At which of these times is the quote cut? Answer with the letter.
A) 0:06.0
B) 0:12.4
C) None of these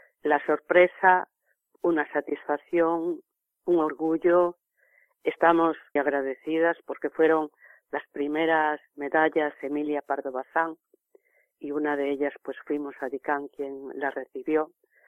A